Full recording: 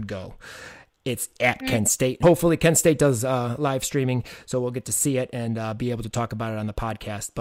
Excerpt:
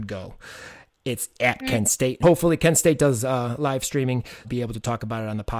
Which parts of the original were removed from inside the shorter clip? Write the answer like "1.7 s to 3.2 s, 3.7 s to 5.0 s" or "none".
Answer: 4.4 s to 5.7 s

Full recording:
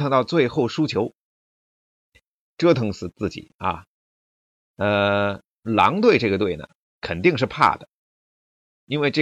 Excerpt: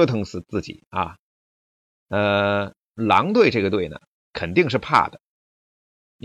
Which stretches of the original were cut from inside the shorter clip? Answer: none

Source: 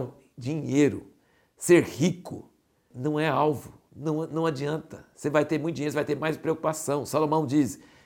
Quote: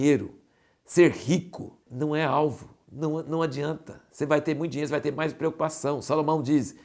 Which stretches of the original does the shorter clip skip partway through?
2.5 s to 2.9 s

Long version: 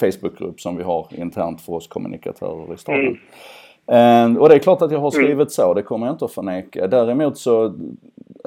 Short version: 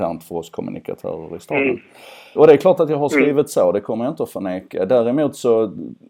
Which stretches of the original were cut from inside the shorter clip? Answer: 3.7 s to 4.4 s

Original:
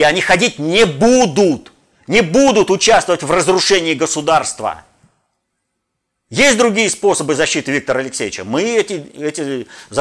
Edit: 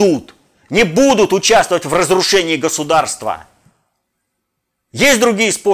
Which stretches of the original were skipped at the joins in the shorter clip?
none

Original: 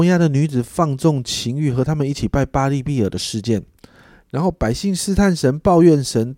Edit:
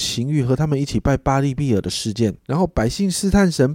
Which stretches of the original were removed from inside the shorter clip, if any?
3.7 s to 4.2 s

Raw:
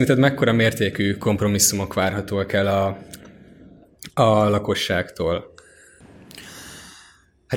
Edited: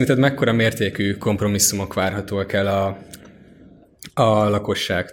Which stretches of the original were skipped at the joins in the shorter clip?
none

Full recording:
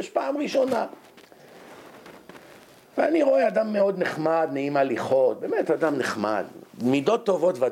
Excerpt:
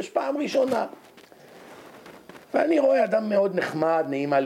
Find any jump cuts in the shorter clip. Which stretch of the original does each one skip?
2.4 s to 2.9 s

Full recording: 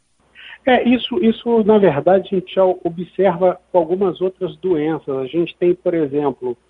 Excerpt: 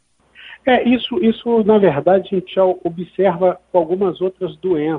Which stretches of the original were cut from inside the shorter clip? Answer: none

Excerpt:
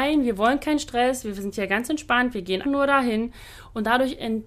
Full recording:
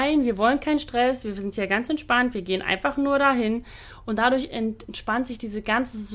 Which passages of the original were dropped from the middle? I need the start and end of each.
2.6 s to 2.9 s

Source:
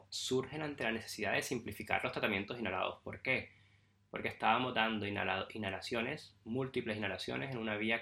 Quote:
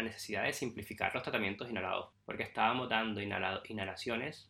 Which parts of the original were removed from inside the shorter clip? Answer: 3.0 s to 4.0 s

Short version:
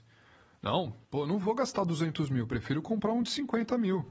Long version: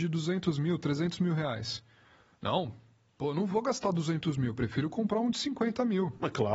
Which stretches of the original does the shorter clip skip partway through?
2.8 s to 3.1 s

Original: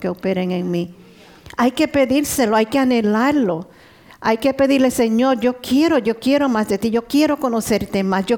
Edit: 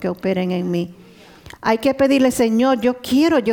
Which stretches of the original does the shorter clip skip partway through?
1.5 s to 4.1 s

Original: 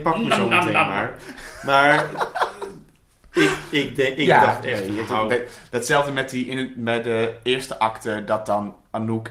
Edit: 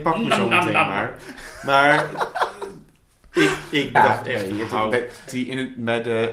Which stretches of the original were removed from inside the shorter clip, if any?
3.9 s to 4.3 s, 5.7 s to 6.3 s

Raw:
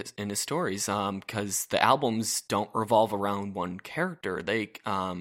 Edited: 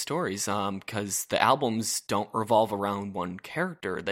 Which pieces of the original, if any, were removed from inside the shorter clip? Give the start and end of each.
none

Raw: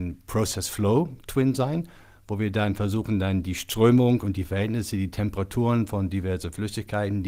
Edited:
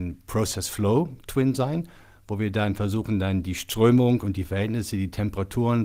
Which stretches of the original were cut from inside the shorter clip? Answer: none

